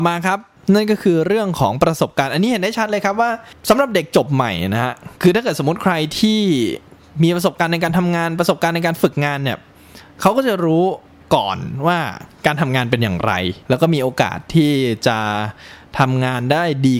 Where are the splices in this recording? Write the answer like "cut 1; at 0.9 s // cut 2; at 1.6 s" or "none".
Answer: cut 1; at 5.1 s // cut 2; at 13.6 s